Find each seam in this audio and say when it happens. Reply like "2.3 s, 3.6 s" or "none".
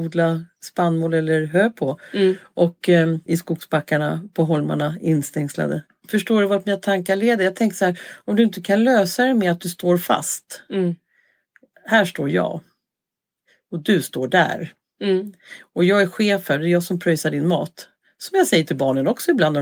3.3 s, 5.9 s